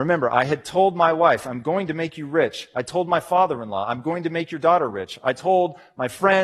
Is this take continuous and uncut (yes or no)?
yes